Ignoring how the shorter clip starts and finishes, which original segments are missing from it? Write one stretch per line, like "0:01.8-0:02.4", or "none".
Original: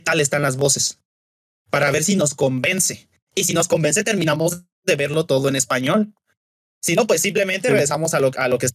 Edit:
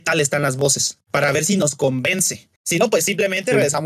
0:01.0-0:01.6
0:03.1-0:06.7